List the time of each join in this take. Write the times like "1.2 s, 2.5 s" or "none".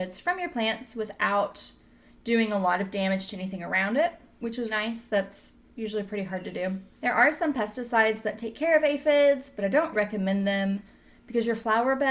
4.7 s, 6.9 s, 9.9 s